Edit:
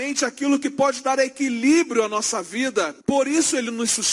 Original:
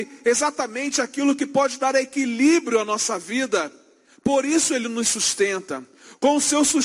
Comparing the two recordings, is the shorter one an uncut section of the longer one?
no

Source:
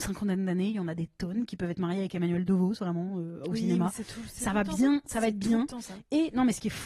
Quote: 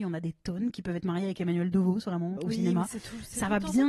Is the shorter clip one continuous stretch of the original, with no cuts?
no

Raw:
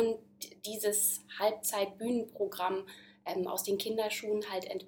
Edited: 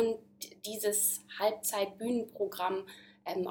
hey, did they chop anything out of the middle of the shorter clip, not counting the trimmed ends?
no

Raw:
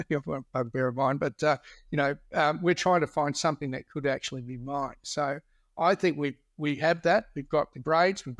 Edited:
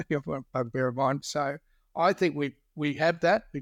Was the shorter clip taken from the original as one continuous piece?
no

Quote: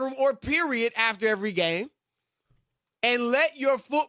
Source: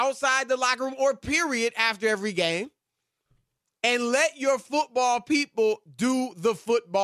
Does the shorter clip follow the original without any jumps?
yes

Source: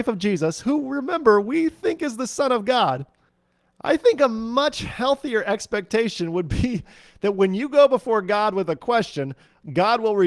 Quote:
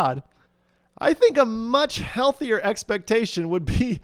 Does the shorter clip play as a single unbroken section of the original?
yes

